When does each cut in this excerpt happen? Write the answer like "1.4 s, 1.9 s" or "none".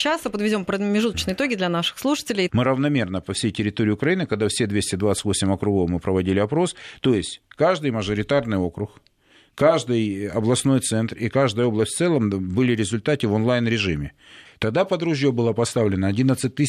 2.5 s, 14.5 s